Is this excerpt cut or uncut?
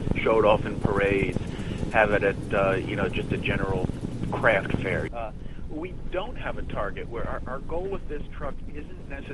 cut